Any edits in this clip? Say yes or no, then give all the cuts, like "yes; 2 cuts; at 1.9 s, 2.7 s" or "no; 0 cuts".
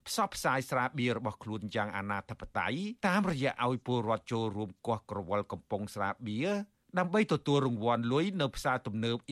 yes; 1 cut; at 3.0 s